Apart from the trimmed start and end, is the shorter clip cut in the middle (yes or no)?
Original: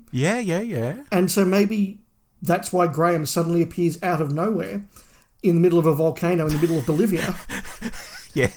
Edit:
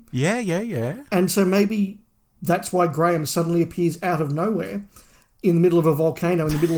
no